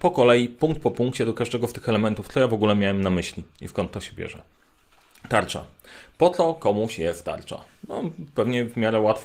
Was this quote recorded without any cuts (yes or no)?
yes